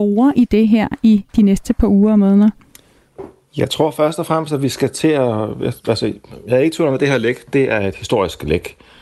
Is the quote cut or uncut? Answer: uncut